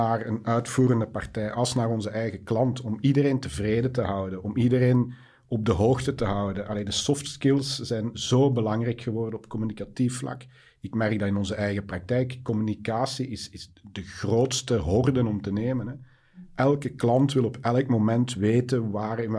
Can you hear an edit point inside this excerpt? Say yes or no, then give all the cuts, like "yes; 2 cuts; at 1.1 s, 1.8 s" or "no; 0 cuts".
no; 0 cuts